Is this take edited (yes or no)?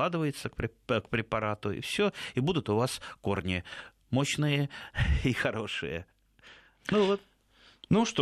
no